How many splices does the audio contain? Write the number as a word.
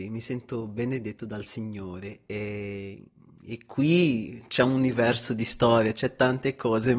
zero